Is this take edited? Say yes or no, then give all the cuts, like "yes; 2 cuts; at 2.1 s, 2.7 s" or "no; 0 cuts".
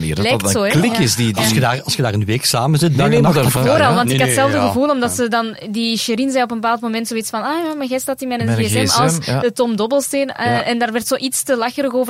yes; 1 cut; at 3.6 s